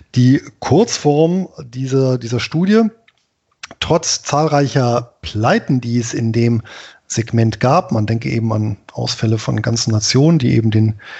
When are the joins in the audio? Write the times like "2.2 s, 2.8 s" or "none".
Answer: none